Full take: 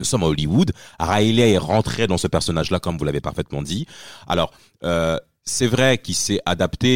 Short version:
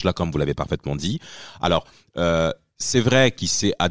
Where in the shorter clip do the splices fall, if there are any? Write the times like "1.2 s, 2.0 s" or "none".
none